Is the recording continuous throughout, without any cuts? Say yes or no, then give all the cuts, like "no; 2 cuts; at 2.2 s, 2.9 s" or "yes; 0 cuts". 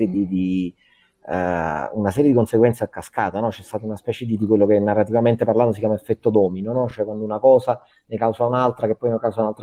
yes; 0 cuts